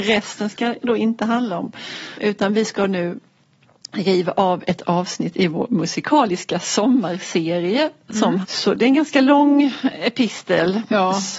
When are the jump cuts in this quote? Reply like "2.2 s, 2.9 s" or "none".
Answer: 2.2 s, 8.4 s